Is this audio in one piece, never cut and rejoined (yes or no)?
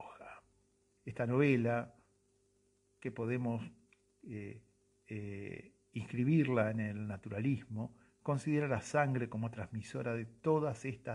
no